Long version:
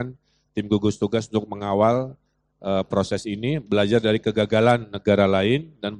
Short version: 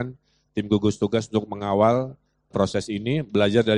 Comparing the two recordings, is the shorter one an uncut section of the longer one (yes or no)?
no